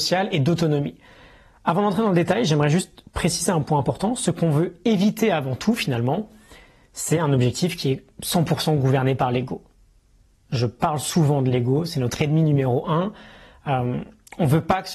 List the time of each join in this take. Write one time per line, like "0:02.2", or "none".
none